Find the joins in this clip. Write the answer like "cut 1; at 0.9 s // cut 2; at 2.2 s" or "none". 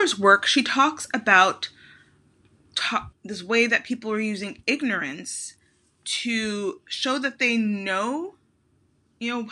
cut 1; at 3.1 s